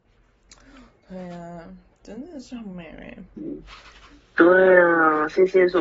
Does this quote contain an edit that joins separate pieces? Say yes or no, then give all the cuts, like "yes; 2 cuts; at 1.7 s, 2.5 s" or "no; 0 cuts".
yes; 1 cut; at 3.4 s